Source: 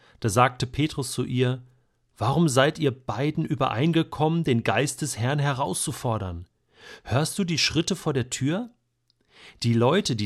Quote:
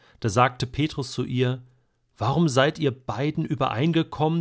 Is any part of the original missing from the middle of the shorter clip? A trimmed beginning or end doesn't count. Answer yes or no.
no